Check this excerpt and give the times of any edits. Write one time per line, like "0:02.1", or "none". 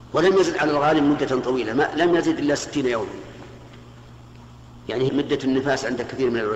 0:05.1